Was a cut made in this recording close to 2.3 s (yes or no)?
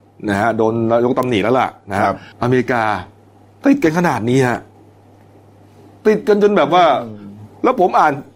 yes